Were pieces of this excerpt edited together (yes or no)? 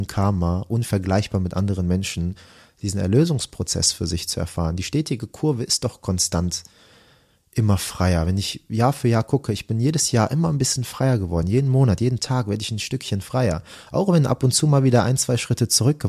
no